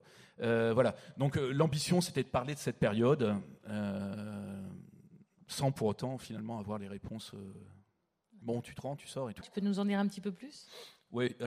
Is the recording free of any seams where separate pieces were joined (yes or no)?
no